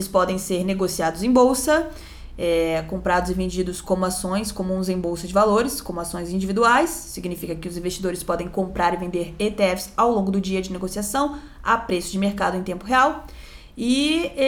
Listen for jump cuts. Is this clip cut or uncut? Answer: uncut